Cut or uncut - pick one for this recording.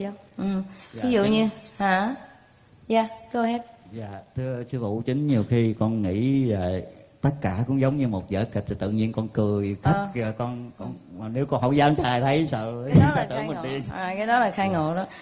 uncut